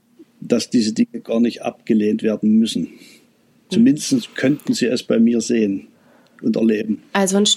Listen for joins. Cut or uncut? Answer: cut